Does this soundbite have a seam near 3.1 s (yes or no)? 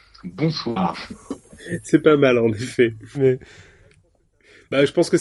yes